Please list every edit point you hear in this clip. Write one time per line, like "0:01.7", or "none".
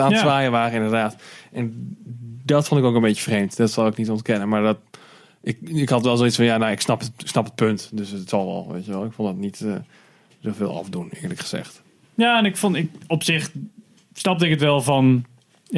none

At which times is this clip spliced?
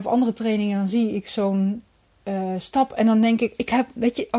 none

